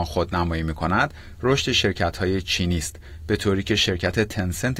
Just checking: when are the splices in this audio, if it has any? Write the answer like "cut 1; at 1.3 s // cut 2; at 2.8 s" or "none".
none

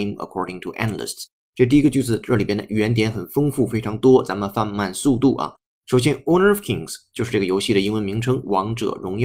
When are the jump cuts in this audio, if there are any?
none

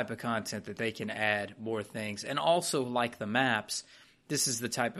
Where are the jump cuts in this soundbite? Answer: none

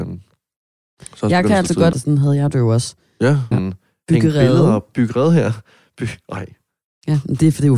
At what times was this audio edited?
cut 1; at 1.9 s // cut 2; at 3.5 s

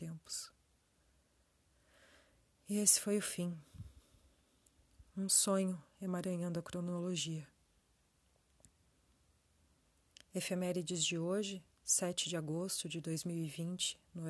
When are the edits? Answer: none

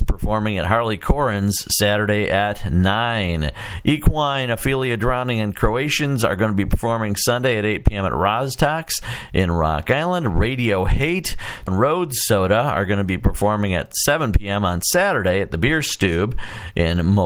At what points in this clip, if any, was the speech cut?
cut 1; at 11.7 s

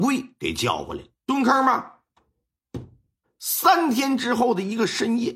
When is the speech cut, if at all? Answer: cut 1; at 1.2 s // cut 2; at 3.2 s

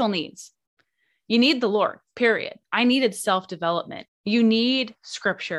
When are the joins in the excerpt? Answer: cut 1; at 2.6 s // cut 2; at 4.1 s

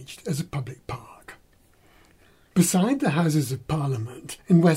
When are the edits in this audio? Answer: cut 1; at 2.5 s

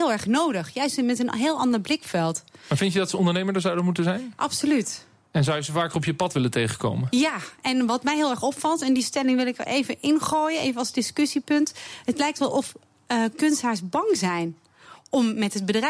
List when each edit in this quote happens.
none

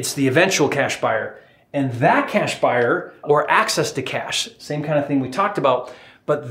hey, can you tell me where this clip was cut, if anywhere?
cut 1; at 3.2 s

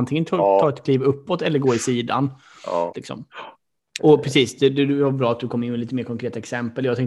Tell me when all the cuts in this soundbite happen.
cut 1; at 2.9 s // cut 2; at 4.0 s

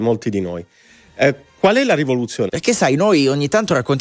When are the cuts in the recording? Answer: cut 1; at 2.5 s

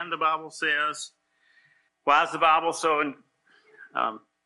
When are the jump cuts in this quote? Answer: cut 1; at 1.9 s

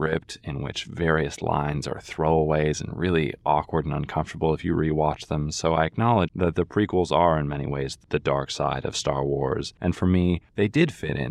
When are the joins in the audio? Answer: cut 1; at 6.3 s // cut 2; at 9.8 s

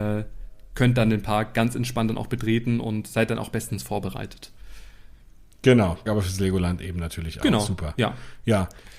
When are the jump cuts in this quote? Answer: cut 1; at 6.1 s

